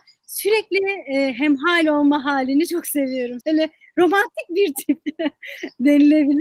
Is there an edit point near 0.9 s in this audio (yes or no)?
no